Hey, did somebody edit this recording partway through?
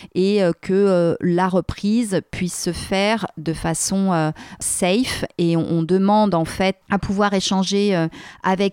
yes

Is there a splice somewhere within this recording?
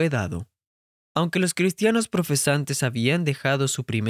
yes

